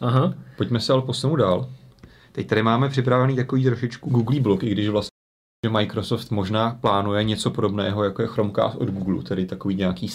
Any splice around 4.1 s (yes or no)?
yes